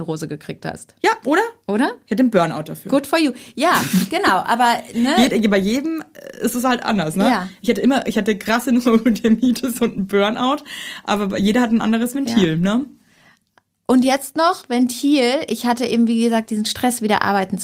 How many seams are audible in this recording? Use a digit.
0